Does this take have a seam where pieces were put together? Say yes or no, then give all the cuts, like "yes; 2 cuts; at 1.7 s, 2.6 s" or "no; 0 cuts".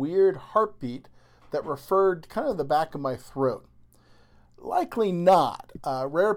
yes; 1 cut; at 4.5 s